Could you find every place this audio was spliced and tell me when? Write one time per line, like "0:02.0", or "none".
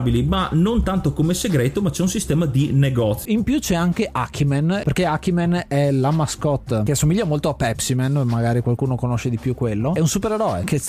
0:03.3
0:04.8